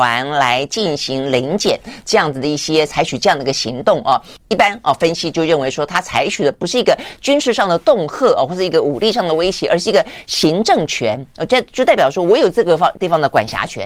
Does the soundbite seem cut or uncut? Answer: cut